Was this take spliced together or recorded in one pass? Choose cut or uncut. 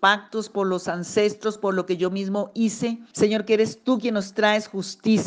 cut